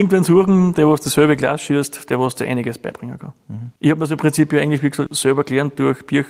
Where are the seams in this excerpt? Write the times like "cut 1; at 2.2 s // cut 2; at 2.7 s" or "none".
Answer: cut 1; at 3.8 s // cut 2; at 5.1 s